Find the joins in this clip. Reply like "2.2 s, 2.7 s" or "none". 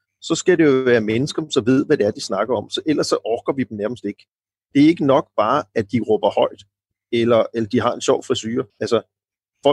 8.7 s